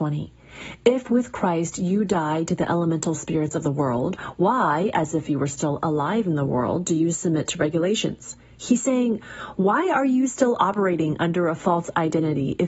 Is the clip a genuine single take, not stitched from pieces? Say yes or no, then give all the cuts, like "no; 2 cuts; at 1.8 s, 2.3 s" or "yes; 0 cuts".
yes; 0 cuts